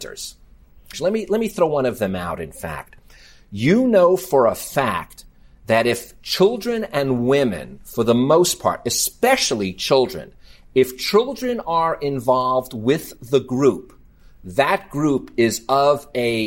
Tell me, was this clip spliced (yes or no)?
yes